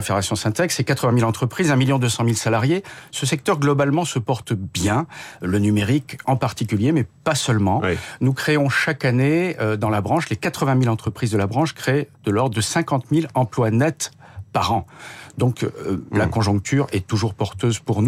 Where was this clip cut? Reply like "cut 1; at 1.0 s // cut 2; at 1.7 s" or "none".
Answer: none